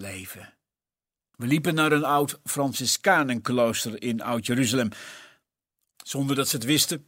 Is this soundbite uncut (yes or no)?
no